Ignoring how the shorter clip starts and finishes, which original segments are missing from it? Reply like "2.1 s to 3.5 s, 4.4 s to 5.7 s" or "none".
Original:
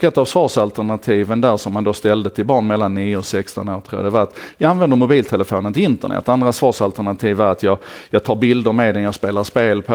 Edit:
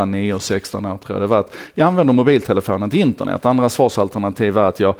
none